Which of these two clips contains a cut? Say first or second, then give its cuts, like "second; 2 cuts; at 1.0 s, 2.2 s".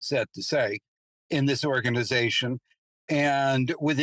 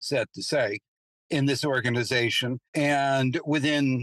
second; 1 cut; at 2.7 s